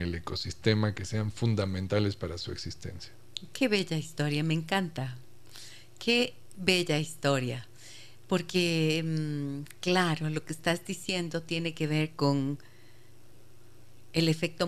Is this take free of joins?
yes; 0 cuts

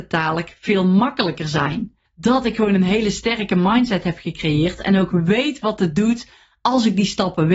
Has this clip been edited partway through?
yes; 1 cut; at 2.1 s

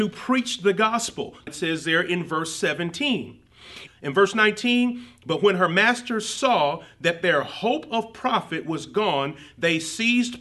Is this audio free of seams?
no; 2 cuts; at 1.5 s, 3.9 s

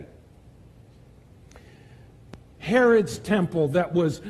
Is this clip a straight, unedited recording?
no; 1 cut; at 2.6 s

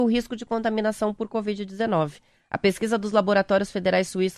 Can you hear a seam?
no; 0 cuts

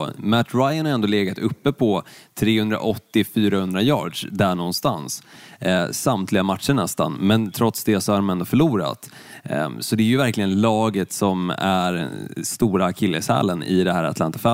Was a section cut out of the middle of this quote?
no; 0 cuts

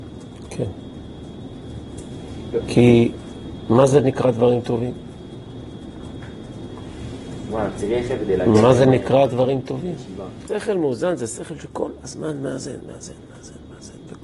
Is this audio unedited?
no; 2 cuts; at 2.6 s, 10.5 s

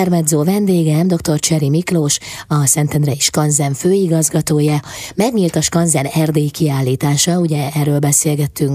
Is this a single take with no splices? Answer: yes; 0 cuts

